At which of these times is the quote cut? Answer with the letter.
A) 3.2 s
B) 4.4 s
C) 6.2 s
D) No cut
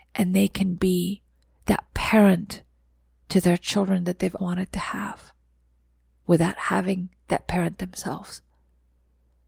B